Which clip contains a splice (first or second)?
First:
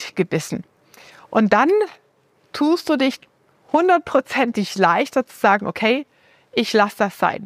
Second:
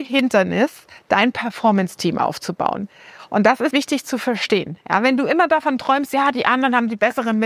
second